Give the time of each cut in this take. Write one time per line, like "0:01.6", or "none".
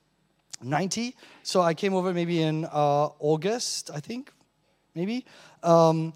none

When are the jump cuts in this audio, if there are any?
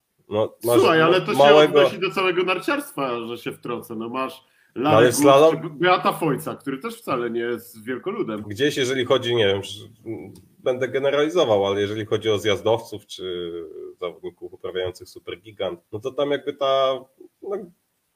0:08.4
0:15.9

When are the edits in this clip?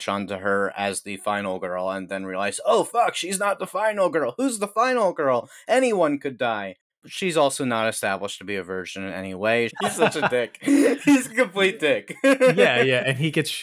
0:06.9
0:09.7

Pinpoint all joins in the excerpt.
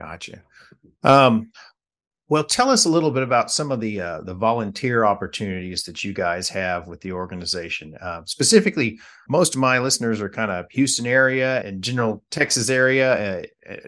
0:09.3
0:11.6

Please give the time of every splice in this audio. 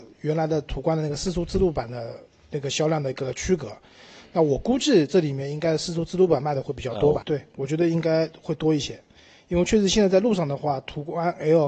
0:07.2

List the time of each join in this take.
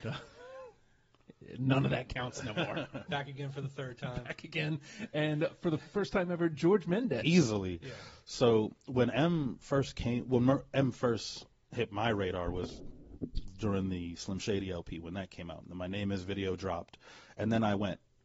0:03.1
0:07.2

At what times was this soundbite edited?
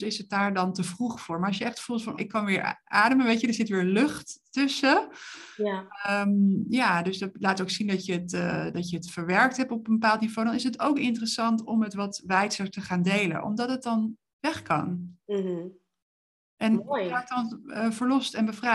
0:02.2

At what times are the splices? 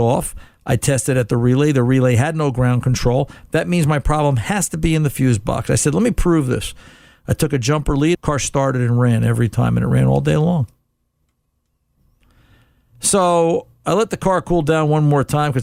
0:08.1

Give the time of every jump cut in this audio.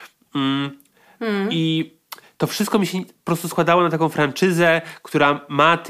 none

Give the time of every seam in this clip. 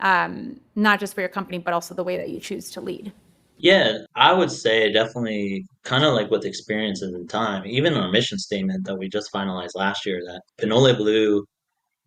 0:04.1
0:05.8
0:10.5

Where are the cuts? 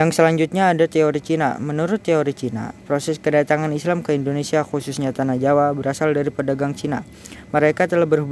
none

